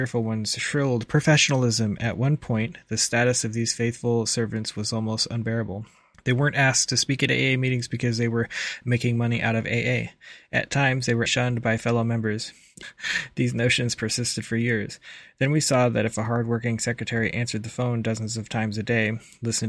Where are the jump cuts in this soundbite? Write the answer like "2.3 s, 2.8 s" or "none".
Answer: 11.3 s, 12.8 s